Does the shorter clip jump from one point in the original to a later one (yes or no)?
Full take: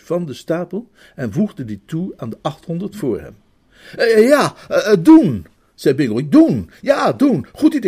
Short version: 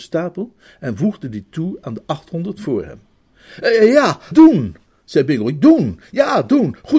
yes